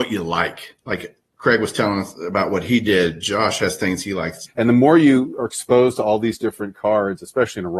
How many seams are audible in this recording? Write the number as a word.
one